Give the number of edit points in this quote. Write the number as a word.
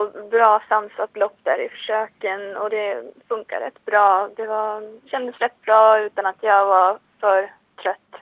one